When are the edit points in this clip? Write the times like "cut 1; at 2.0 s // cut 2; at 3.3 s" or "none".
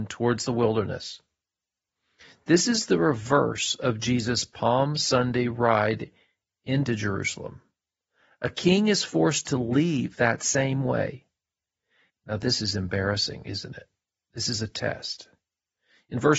cut 1; at 12.1 s